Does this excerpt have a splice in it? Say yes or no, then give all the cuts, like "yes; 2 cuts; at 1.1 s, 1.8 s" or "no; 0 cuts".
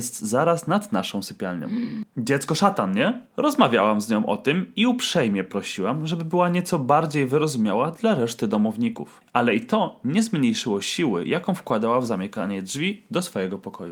yes; 1 cut; at 9.3 s